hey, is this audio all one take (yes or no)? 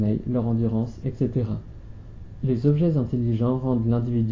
no